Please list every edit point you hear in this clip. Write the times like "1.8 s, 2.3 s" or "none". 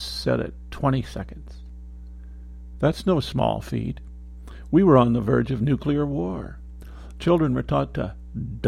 2.7 s